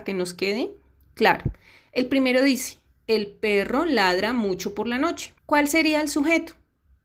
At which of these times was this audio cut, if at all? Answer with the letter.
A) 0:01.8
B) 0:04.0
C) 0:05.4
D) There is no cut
C